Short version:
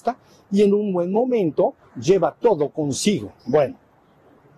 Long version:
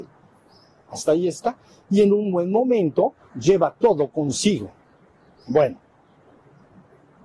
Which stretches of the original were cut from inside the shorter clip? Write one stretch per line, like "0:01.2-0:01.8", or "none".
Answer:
0:04.8-0:05.4